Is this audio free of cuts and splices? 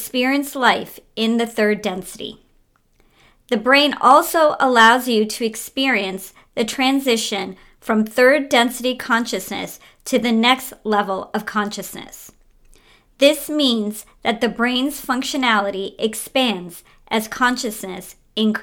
yes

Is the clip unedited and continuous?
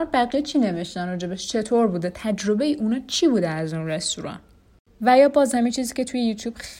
yes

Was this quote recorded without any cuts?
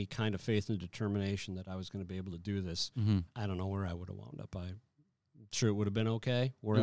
no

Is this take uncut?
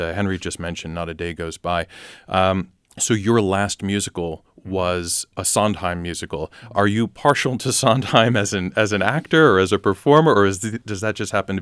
yes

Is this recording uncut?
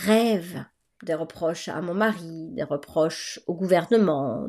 no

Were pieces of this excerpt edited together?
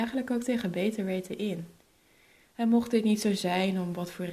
yes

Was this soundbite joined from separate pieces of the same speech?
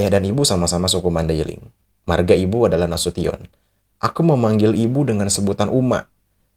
no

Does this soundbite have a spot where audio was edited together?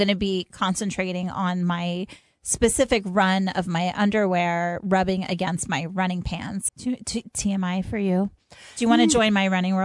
yes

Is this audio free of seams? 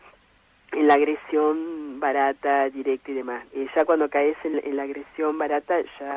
no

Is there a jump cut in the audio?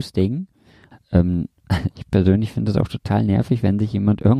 yes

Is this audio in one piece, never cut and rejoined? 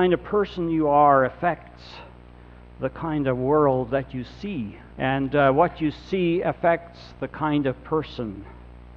no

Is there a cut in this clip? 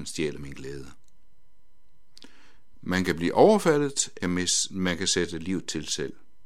yes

